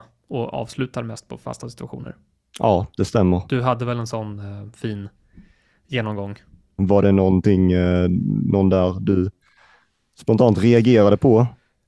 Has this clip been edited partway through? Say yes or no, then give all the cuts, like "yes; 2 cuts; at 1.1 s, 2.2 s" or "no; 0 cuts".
yes; 1 cut; at 6.8 s